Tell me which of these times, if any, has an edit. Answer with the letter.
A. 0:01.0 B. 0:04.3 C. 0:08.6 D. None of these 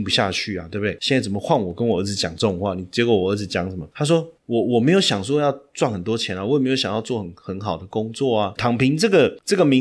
C